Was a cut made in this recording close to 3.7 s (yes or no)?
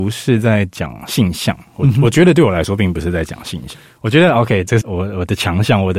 yes